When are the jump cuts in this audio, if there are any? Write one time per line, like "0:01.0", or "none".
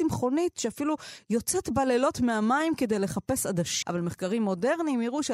0:03.8

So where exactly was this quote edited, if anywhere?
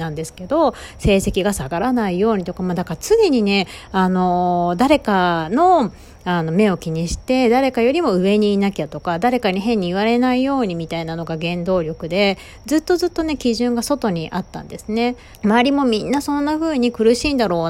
0:15.3

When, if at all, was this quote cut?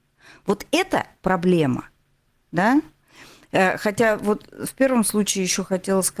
none

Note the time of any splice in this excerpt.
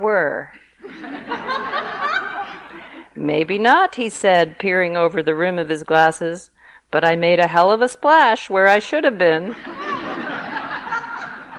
none

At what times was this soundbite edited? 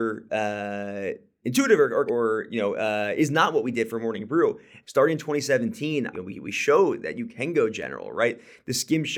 0:02.1
0:04.8
0:06.1

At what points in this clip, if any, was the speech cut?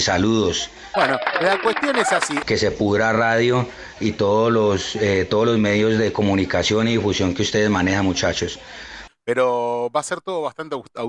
0:00.9
0:02.4
0:09.1

